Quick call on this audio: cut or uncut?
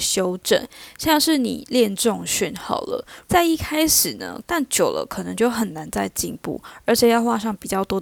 cut